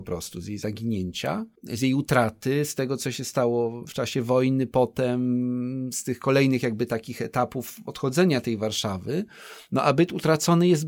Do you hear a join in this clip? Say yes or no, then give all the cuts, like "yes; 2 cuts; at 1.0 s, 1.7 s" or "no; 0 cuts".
no; 0 cuts